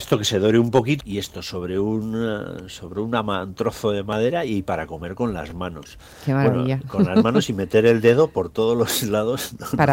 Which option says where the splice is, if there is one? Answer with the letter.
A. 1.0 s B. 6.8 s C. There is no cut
A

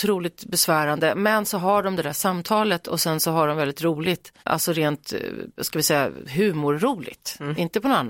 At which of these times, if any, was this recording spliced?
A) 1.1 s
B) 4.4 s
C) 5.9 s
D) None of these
B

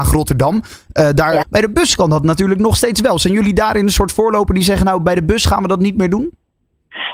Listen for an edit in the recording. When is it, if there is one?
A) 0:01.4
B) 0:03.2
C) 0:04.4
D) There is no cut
A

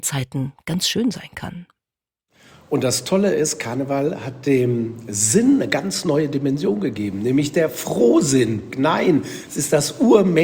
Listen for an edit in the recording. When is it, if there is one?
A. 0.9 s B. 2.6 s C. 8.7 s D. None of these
C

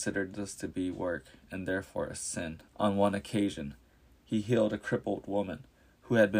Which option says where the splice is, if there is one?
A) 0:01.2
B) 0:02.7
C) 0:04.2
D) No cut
B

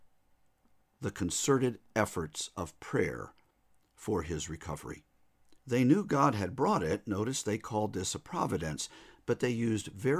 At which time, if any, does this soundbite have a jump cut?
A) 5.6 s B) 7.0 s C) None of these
A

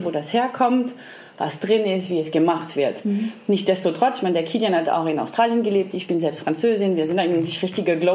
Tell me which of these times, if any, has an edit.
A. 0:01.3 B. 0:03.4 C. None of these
C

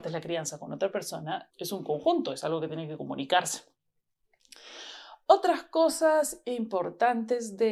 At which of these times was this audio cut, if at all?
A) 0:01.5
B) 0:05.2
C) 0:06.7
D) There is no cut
A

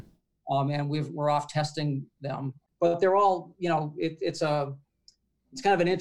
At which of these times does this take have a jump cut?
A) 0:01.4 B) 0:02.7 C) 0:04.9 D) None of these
B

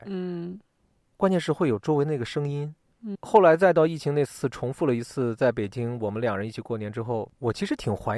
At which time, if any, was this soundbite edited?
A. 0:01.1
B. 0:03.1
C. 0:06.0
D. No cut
B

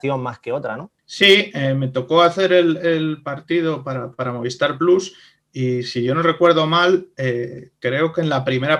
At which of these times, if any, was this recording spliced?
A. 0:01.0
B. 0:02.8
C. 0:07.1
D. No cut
A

